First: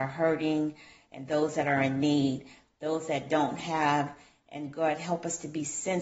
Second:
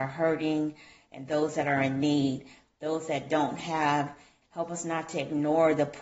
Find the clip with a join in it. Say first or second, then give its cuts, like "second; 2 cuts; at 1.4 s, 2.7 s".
second; 1 cut; at 4.4 s